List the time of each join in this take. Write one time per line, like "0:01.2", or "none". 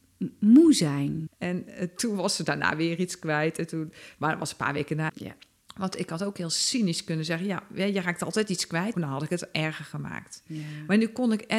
0:01.3
0:05.1
0:08.9